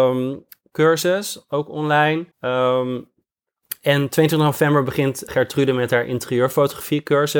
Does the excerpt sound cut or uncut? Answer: cut